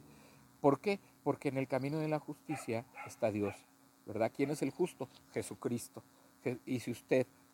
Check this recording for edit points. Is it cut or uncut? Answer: uncut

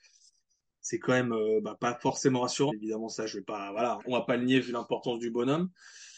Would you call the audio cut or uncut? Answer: cut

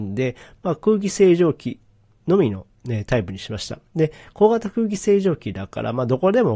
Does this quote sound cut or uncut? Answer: uncut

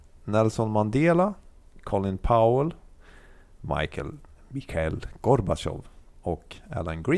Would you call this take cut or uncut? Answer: uncut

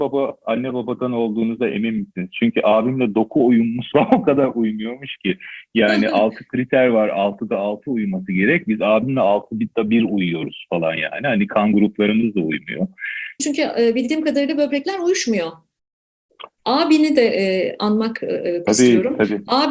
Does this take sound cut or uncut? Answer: cut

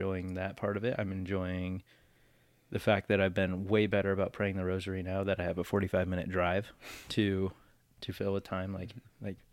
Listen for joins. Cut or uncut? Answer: uncut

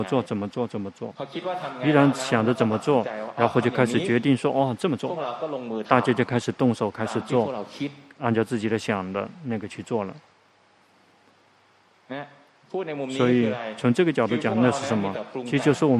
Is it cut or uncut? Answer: uncut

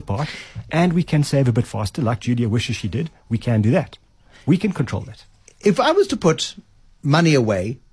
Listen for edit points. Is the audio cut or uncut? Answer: uncut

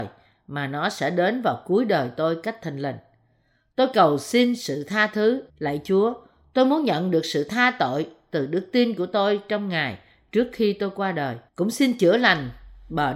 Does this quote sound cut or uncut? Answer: cut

